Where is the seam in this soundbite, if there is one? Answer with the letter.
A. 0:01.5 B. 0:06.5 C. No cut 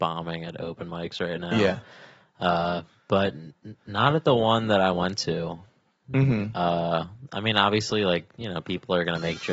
C